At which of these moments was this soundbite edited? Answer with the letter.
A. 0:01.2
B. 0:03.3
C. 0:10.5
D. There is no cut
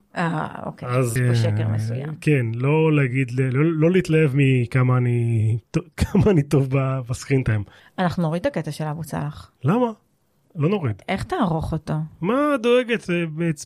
A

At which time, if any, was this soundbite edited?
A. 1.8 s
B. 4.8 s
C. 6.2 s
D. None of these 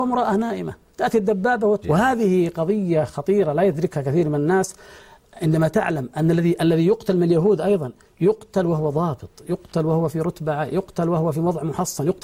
A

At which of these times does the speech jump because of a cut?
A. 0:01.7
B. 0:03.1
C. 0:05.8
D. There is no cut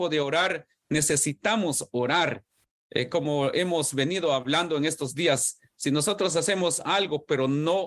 D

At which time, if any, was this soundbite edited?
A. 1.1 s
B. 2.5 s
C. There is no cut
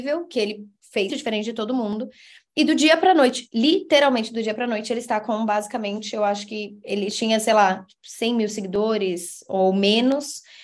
A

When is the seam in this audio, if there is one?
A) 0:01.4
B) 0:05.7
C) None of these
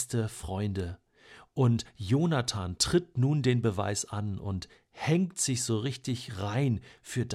C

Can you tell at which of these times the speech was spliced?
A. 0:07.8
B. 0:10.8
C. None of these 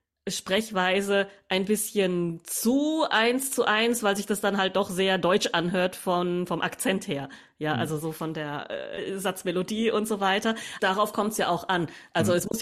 B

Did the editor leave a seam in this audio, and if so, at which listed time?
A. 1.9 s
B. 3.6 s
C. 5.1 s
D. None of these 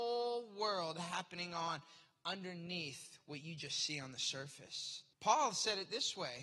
C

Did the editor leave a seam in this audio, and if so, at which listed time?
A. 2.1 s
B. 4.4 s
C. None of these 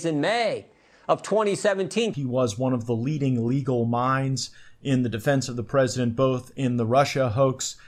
A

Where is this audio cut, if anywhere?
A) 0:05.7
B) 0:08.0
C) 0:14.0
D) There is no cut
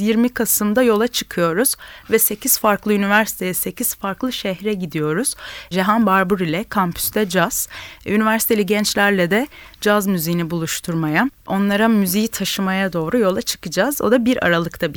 D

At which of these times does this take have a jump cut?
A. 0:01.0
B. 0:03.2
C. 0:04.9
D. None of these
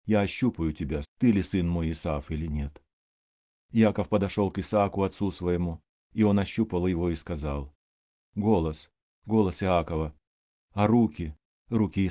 A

